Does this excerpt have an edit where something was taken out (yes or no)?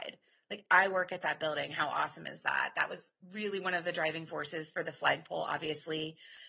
no